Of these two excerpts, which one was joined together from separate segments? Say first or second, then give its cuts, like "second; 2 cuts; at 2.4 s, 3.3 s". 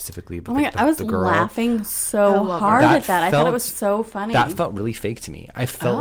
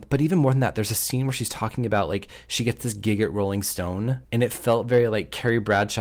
second; 1 cut; at 4.2 s